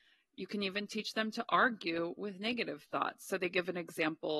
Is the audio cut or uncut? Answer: uncut